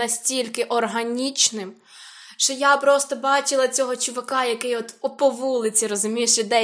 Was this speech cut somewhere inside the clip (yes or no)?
no